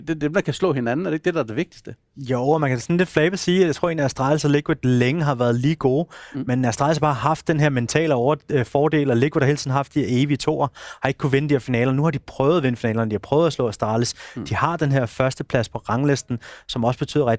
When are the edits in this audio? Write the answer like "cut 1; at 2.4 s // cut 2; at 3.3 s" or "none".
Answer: none